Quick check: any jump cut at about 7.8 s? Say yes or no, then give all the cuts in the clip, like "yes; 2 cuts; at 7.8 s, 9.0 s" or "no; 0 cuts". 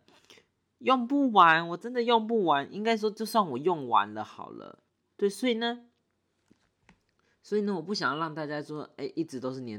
no; 1 cut; at 5.1 s